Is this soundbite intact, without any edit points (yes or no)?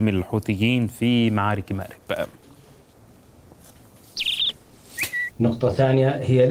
no